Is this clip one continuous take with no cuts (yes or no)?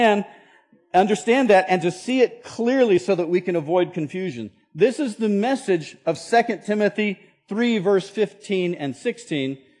yes